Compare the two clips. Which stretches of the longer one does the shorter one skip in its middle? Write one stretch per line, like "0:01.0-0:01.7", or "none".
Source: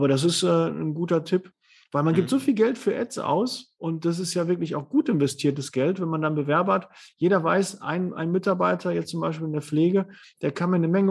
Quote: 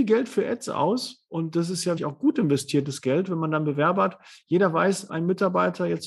0:04.5-0:04.7
0:07.8-0:08.1